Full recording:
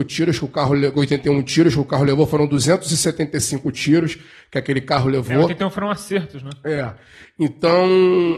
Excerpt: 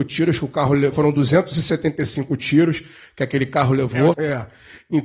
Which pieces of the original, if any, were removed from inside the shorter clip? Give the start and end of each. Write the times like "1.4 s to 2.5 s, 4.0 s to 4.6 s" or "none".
0.9 s to 2.3 s, 5.5 s to 6.6 s